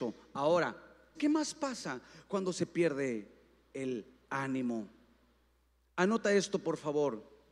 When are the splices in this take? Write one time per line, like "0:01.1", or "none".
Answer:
0:01.1